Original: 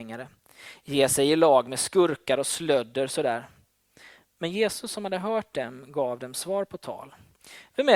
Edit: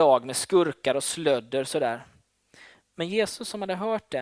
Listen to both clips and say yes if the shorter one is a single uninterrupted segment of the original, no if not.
yes